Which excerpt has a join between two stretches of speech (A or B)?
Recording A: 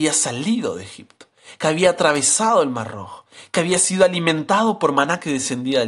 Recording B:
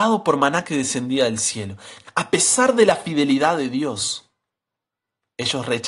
B